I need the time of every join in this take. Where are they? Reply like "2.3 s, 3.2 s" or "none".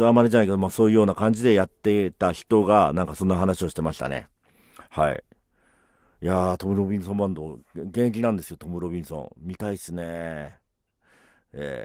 none